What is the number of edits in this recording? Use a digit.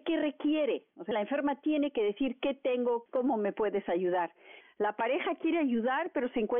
3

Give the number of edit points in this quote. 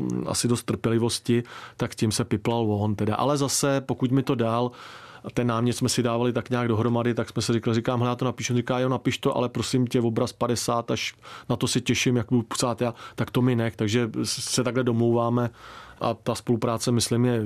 0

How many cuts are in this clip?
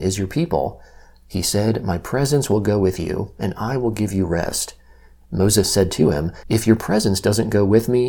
0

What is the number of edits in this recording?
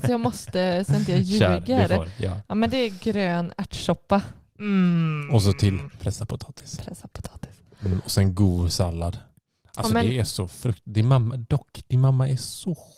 1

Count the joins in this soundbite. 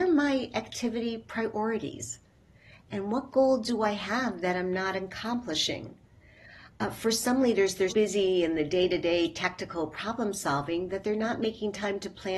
1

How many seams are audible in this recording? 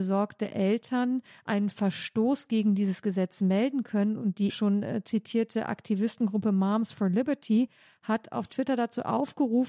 1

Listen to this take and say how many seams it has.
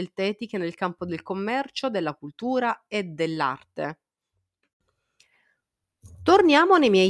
0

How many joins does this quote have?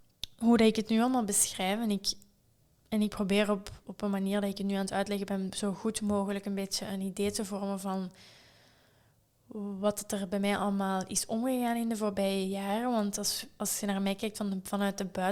1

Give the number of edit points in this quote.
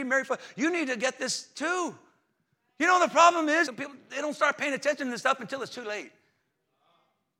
1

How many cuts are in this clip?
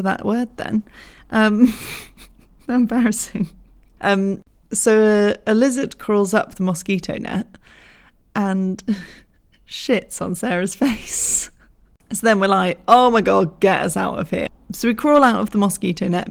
1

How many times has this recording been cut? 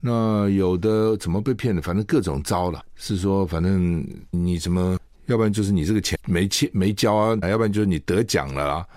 3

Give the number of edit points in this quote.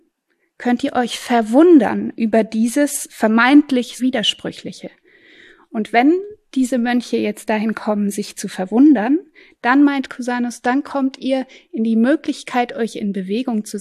1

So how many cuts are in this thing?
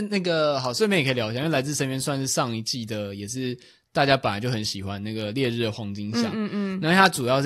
0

